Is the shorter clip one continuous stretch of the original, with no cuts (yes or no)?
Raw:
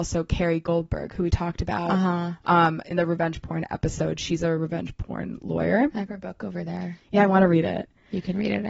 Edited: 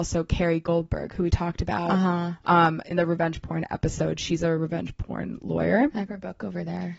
yes